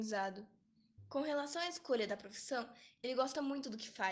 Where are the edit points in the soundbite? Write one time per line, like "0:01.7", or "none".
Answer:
0:01.0

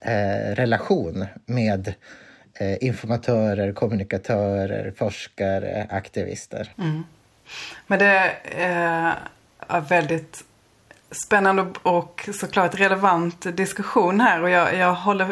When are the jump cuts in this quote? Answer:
0:06.7

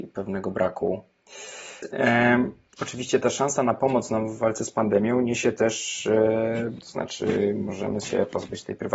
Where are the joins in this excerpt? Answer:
0:01.8
0:06.8

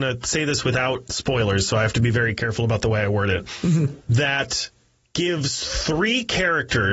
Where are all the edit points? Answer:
0:04.0

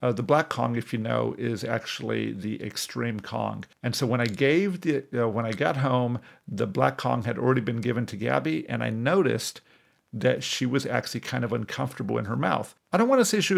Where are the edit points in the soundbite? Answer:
none

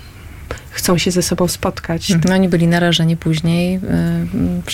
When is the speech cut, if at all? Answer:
0:02.2

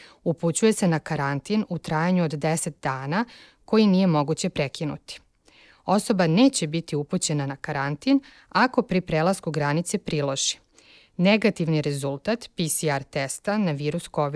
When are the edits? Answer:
none

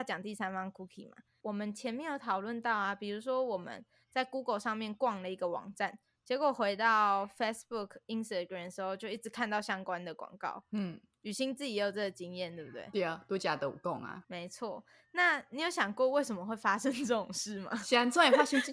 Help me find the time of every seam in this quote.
none

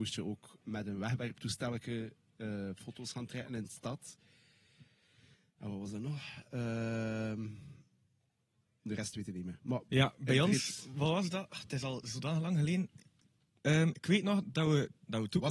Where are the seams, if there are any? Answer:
0:09.9

